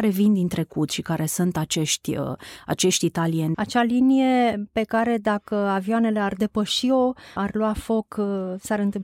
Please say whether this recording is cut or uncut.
cut